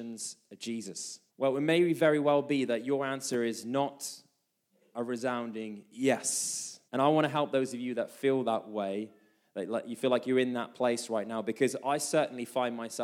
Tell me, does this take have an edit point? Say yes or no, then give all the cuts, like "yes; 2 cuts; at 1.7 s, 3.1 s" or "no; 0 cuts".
yes; 2 cuts; at 1.3 s, 6.9 s